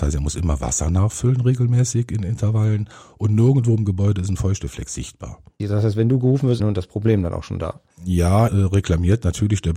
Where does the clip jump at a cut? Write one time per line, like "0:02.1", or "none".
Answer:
0:05.6
0:06.6
0:08.5